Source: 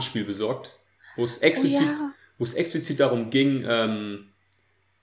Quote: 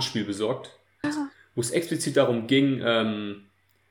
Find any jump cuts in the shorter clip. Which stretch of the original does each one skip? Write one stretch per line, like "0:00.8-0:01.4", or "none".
0:01.0-0:01.9